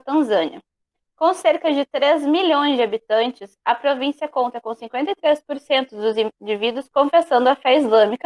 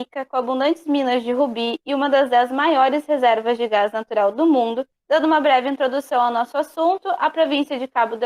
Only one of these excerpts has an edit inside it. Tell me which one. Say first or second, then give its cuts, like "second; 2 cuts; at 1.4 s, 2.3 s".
second; 1 cut; at 5.0 s